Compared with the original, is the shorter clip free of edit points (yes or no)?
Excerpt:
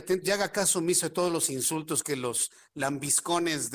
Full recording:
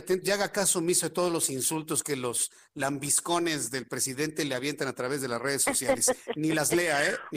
yes